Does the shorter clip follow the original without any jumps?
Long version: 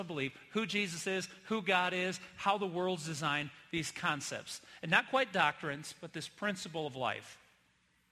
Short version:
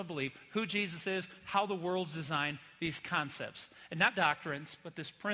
no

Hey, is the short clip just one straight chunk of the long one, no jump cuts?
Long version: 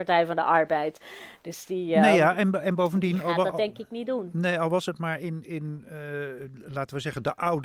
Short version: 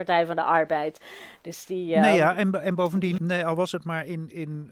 no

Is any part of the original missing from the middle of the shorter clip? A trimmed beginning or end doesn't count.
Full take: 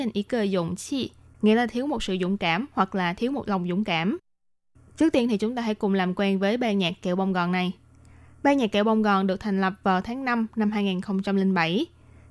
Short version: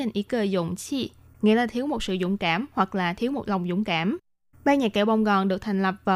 yes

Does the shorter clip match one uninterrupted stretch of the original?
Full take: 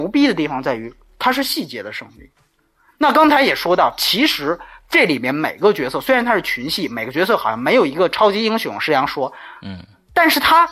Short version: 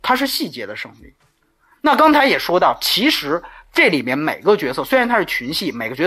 yes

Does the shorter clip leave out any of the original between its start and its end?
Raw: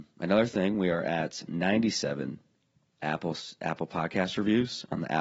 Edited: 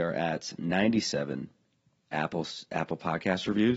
no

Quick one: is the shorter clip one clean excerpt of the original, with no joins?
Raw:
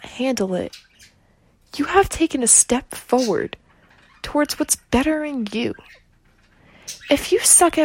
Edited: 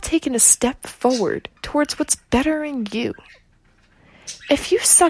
no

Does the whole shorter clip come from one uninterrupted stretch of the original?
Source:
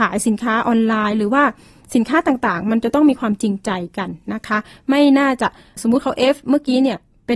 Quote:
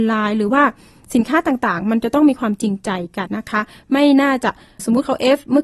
no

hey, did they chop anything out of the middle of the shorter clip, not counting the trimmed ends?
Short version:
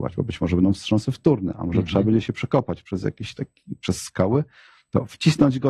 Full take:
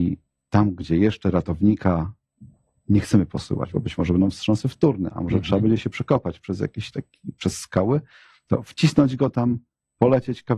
no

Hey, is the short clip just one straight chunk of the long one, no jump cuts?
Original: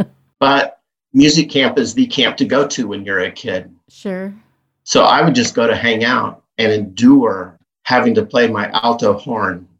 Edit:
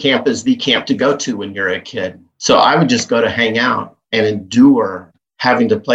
no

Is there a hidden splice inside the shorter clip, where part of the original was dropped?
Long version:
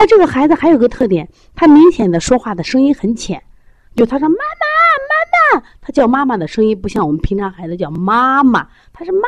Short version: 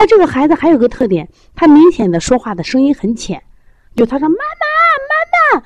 no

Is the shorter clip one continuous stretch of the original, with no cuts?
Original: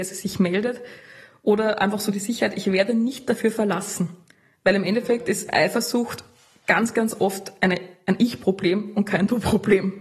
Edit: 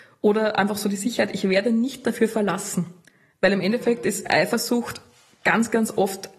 yes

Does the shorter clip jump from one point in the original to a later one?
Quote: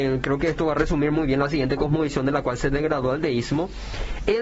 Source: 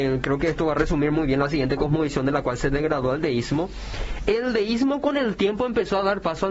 no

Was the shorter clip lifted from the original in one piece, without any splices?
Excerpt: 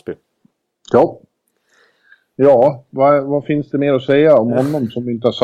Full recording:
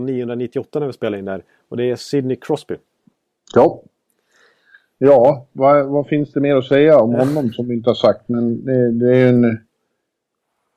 yes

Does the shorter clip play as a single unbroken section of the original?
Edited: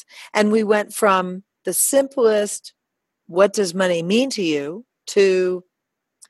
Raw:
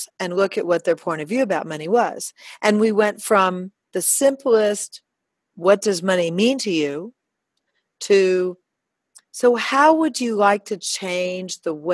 no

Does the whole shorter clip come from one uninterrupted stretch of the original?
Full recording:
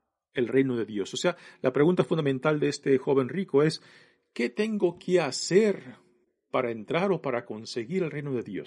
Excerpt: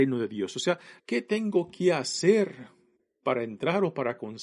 no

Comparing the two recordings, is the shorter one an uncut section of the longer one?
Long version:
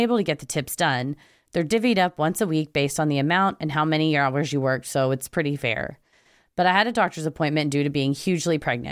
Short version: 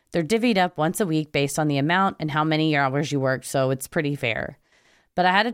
yes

